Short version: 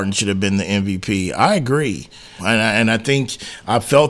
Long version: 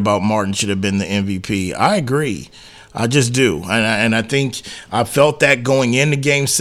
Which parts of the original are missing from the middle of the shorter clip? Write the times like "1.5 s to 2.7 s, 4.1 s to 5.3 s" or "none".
2.8 s to 3.6 s